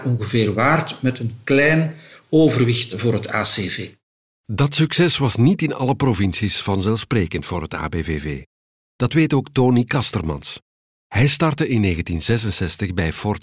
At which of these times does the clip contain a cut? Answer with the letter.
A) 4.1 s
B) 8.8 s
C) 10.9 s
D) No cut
D